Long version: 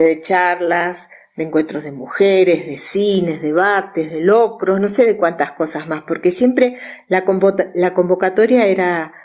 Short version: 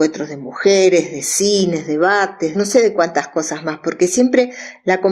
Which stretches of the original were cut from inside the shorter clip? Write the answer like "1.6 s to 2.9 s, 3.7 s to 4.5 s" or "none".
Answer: 4.1 s to 4.8 s